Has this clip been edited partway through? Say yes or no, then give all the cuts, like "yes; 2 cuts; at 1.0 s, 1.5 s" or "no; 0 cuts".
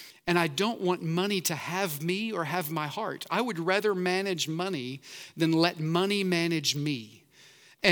no; 0 cuts